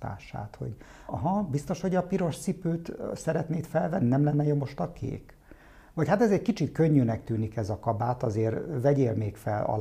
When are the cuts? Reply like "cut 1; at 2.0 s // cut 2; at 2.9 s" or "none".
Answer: cut 1; at 1.1 s